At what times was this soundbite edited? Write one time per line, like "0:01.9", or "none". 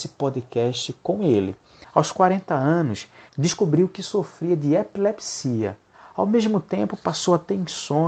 0:01.8
0:03.3